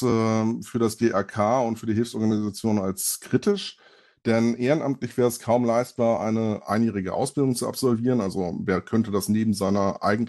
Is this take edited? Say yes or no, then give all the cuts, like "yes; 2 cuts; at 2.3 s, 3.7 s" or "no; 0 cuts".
no; 0 cuts